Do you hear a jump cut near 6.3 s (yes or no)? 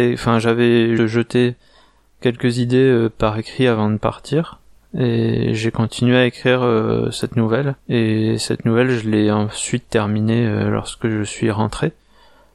no